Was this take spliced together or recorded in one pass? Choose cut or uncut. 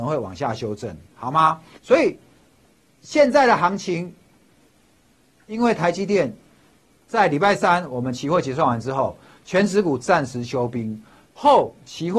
cut